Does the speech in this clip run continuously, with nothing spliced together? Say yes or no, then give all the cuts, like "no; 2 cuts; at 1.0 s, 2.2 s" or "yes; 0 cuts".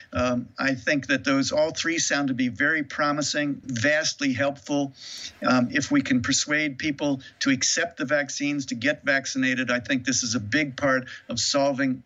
no; 1 cut; at 3.6 s